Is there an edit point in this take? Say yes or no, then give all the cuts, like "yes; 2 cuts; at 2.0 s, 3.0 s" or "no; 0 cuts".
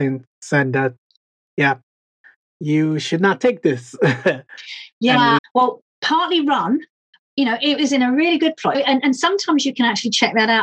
yes; 3 cuts; at 5.4 s, 7.3 s, 8.7 s